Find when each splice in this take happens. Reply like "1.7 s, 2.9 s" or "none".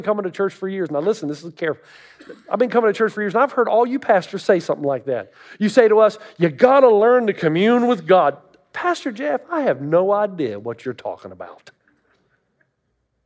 none